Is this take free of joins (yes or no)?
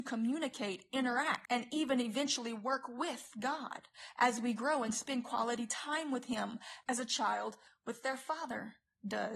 yes